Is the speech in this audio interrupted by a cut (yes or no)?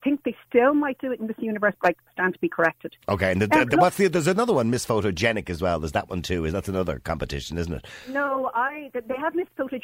no